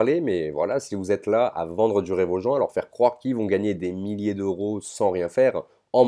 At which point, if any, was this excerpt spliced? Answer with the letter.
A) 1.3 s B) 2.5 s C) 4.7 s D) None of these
D